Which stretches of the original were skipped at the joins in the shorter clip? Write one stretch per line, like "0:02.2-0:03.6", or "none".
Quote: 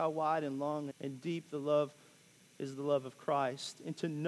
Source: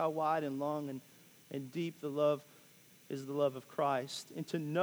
0:00.9-0:01.4